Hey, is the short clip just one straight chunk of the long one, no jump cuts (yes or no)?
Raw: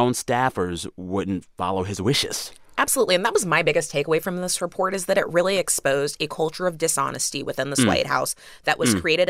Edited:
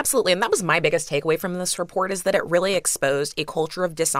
yes